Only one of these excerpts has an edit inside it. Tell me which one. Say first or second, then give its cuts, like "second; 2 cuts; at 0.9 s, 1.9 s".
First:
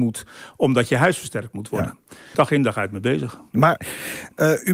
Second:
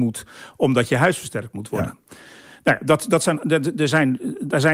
first; 1 cut; at 2.3 s